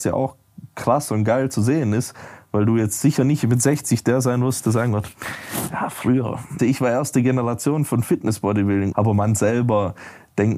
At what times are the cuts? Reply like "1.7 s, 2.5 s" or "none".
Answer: 6.6 s, 8.9 s